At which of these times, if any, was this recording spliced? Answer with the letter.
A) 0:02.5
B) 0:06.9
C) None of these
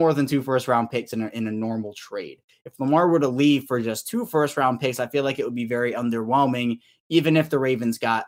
C